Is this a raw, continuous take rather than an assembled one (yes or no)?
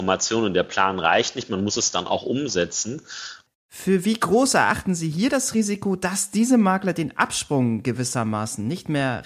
no